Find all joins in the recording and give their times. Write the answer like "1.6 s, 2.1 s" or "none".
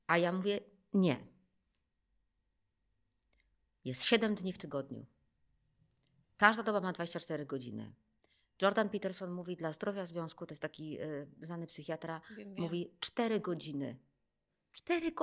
none